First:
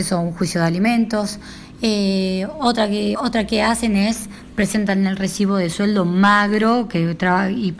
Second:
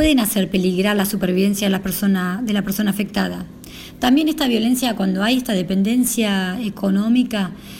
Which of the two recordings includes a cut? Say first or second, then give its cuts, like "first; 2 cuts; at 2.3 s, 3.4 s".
first; 1 cut; at 3.2 s